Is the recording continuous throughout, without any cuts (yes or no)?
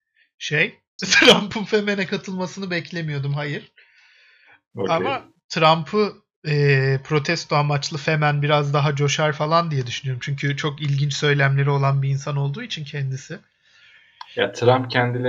no